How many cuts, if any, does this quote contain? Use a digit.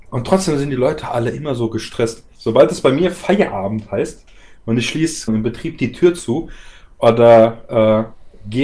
2